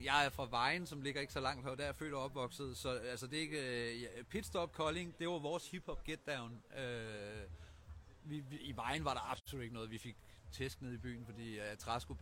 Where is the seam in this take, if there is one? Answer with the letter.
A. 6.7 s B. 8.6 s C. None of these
C